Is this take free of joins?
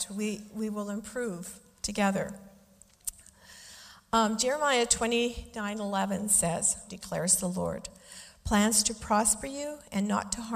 no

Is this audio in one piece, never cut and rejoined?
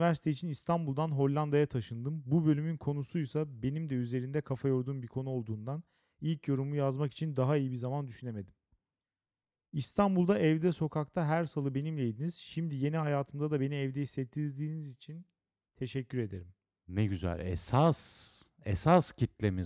yes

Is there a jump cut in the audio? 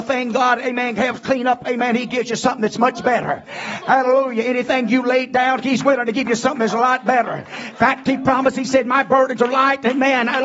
no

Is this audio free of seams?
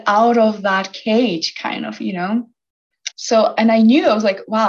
no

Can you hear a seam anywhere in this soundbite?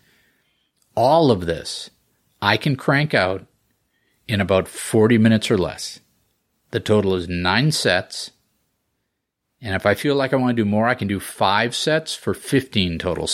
no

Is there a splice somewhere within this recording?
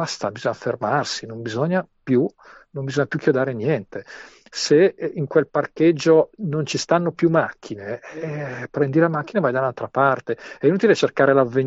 no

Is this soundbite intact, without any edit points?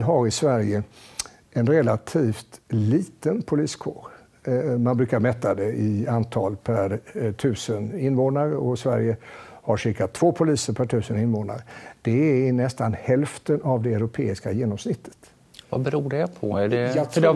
yes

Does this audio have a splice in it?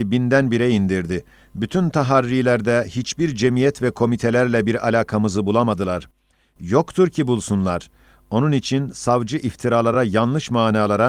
no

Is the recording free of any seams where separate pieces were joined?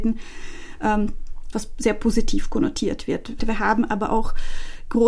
no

